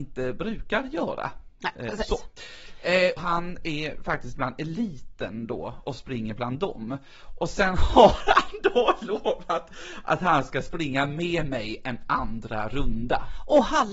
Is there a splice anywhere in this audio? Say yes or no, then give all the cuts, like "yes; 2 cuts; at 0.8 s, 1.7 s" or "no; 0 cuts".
yes; 1 cut; at 3.2 s